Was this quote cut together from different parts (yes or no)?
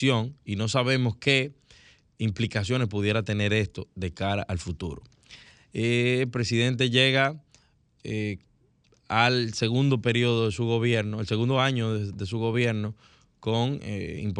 no